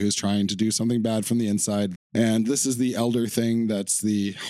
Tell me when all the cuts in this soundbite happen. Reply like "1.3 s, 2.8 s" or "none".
2.0 s